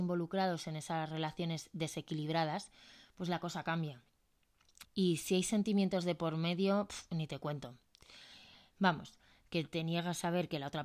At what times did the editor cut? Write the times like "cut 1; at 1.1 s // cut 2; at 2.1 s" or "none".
cut 1; at 4.8 s // cut 2; at 8.7 s